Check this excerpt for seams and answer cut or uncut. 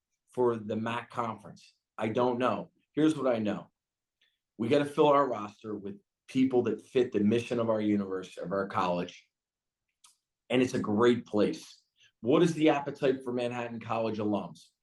cut